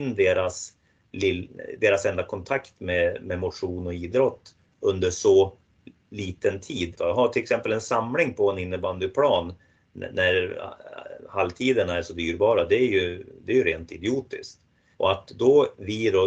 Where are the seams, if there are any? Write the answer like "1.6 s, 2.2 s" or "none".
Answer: 6.9 s, 14.9 s